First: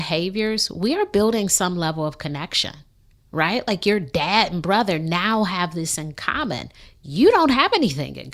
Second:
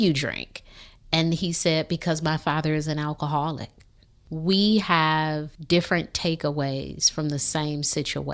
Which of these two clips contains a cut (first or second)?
second